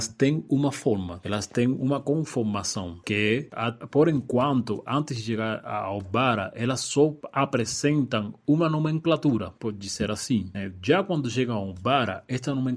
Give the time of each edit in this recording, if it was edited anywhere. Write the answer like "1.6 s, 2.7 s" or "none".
none